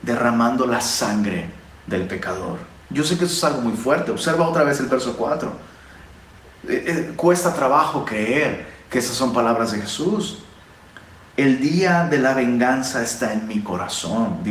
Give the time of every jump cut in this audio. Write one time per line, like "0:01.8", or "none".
0:02.8